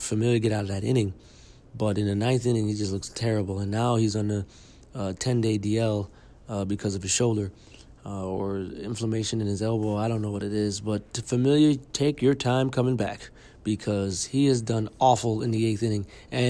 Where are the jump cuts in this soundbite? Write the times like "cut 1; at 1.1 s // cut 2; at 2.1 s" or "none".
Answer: none